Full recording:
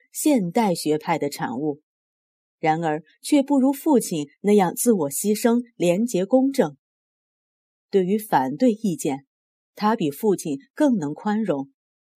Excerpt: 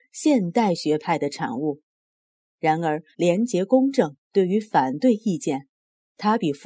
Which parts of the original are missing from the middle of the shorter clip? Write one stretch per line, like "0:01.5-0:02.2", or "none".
0:03.1-0:05.7
0:06.8-0:07.8